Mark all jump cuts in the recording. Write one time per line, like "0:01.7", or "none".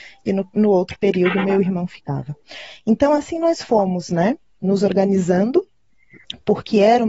none